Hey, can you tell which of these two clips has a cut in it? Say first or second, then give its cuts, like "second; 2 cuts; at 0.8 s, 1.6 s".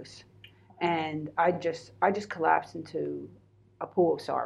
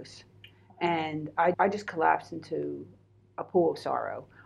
second; 1 cut; at 1.5 s